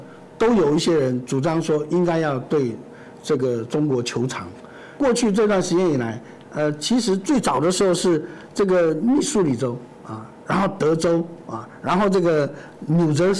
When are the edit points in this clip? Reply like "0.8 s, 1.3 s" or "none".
none